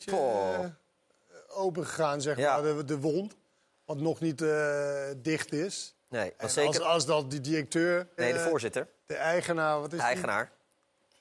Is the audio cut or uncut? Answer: cut